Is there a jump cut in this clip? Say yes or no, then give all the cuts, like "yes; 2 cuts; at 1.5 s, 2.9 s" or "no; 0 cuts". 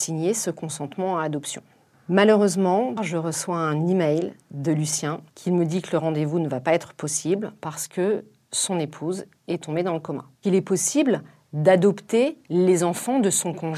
yes; 3 cuts; at 3.0 s, 5.3 s, 10.3 s